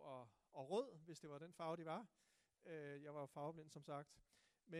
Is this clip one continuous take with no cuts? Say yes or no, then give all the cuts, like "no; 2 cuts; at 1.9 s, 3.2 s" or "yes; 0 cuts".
yes; 0 cuts